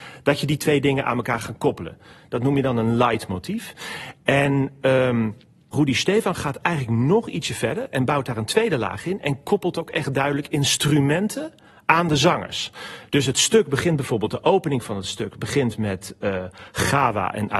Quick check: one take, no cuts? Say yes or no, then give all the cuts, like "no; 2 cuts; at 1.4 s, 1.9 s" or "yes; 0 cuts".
yes; 0 cuts